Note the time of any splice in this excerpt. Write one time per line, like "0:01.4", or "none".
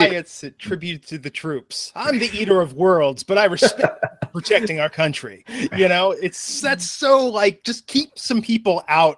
none